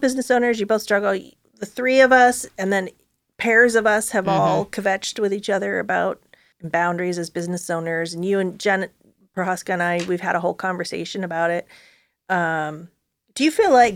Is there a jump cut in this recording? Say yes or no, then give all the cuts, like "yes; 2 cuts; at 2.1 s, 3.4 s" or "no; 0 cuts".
no; 0 cuts